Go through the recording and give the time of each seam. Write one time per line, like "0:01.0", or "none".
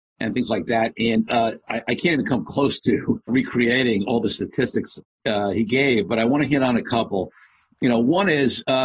0:03.3